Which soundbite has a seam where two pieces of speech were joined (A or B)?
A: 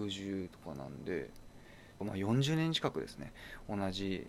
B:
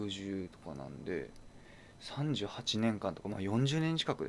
A